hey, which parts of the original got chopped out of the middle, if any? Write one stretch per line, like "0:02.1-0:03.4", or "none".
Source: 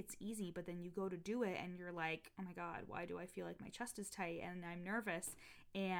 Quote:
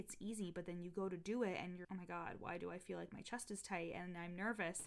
0:01.8-0:02.3